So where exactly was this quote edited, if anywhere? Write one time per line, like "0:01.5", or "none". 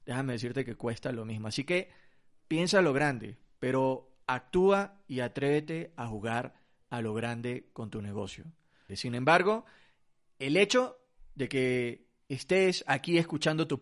0:08.9